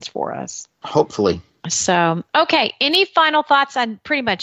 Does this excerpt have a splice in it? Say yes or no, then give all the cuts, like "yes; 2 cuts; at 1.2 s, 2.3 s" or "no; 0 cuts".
no; 0 cuts